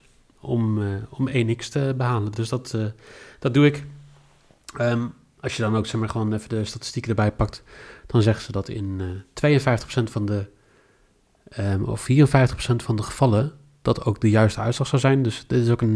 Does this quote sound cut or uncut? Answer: uncut